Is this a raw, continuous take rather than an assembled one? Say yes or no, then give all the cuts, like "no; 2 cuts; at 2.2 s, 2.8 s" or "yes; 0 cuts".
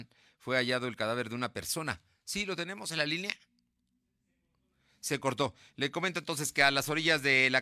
yes; 0 cuts